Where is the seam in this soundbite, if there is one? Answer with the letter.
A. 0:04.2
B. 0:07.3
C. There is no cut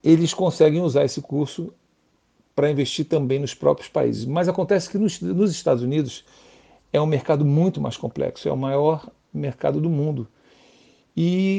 C